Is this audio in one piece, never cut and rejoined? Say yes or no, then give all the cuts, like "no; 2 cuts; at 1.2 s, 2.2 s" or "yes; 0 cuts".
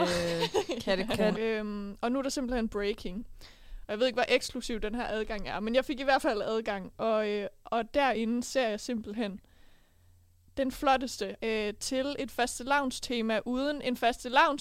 no; 3 cuts; at 1.3 s, 3.8 s, 11.4 s